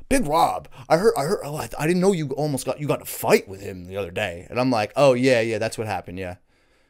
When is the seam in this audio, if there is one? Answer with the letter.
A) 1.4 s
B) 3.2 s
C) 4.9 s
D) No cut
D